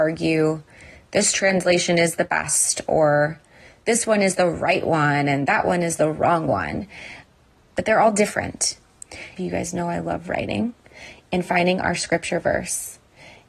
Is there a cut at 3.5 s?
no; 1 cut; at 9.4 s

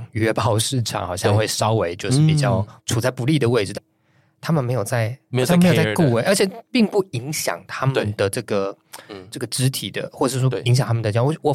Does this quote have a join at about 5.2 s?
no; 1 cut; at 3.7 s

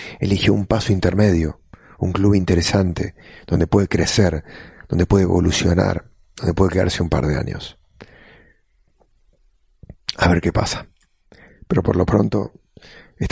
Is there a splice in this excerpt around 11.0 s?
no; 0 cuts

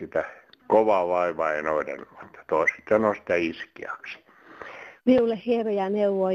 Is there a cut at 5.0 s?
yes; 1 cut; at 5.0 s

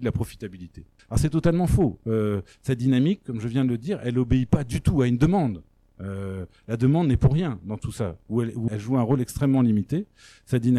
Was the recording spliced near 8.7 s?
yes; 2 cuts; at 1.0 s, 8.7 s

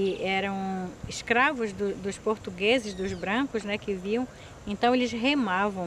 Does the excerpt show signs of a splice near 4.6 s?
no; 0 cuts

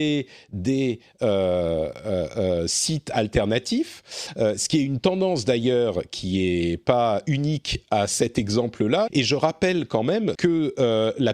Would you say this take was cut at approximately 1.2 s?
no; 2 cuts; at 9.1 s, 10.3 s

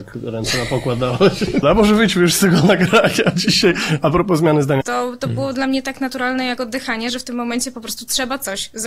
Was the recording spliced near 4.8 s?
yes; 2 cuts; at 1.6 s, 4.8 s

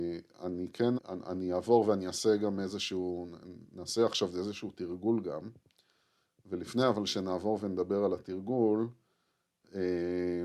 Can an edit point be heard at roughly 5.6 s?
no; 1 cut; at 0.9 s

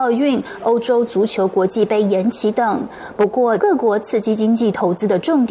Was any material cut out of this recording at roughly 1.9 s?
no; 1 cut; at 3.6 s

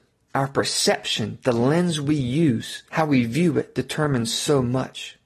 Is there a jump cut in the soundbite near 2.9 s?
yes; 1 cut; at 2.9 s

